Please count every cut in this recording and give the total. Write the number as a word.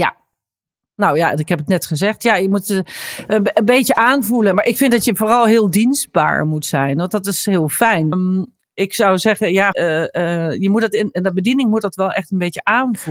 two